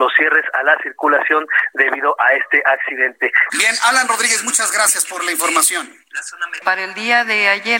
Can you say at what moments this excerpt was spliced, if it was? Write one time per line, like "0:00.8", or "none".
0:03.5
0:06.6

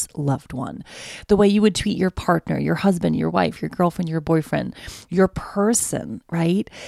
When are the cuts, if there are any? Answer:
none

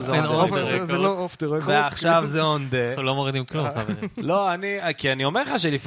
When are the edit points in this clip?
none

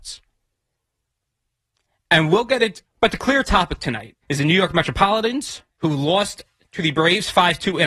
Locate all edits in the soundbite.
0:02.9
0:04.2
0:05.7

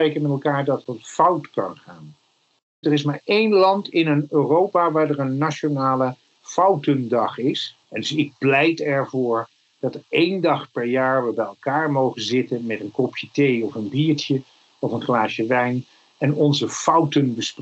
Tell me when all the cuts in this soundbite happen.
0:02.8
0:07.8

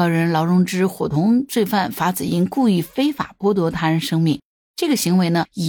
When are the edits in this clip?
none

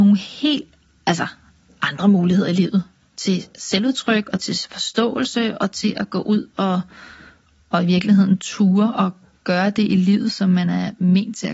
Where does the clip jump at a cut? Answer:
none

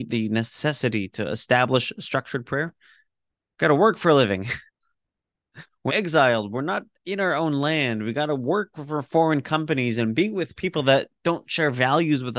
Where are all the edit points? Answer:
0:04.7
0:05.9

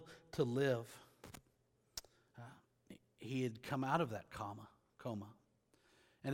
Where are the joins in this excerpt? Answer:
none

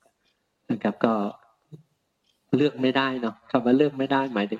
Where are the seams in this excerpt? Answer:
none

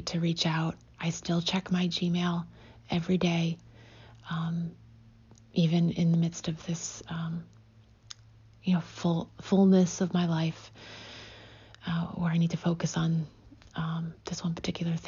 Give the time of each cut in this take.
none

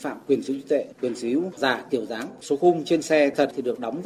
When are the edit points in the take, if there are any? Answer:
none

